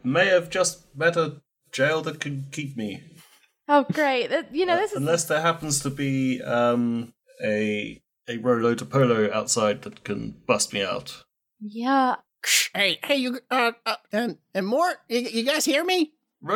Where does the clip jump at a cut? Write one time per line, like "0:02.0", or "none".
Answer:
0:14.1